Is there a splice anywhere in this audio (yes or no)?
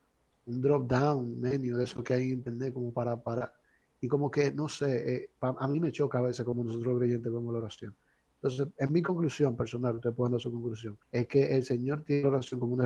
yes